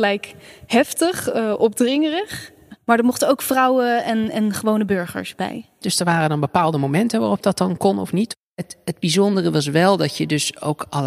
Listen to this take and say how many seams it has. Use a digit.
2